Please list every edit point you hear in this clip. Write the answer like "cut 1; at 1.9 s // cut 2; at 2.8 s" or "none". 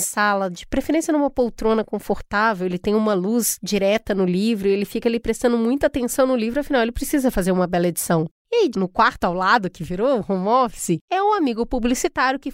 cut 1; at 8.7 s